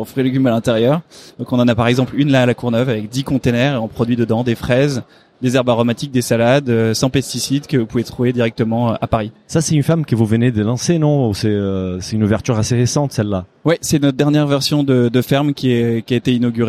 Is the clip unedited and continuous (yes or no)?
yes